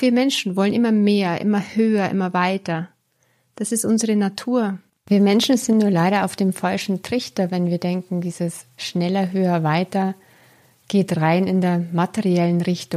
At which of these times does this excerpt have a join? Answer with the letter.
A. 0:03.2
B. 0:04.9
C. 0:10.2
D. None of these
B